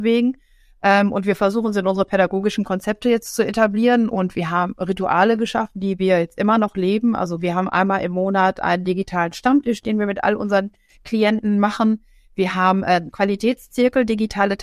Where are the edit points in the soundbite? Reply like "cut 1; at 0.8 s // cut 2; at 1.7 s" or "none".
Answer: none